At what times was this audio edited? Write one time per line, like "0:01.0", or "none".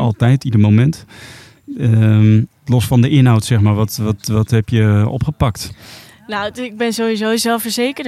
none